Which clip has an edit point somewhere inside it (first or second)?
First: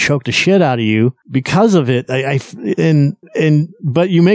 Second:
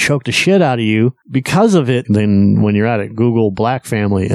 second